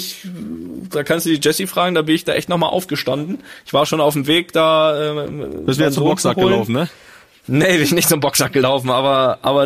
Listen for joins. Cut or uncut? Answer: uncut